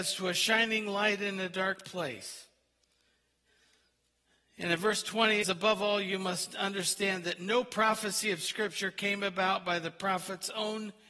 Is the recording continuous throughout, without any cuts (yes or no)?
no